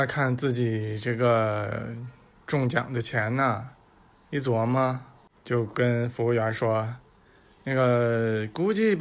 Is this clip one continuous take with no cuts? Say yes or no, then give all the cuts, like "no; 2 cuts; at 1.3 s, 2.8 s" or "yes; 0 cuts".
yes; 0 cuts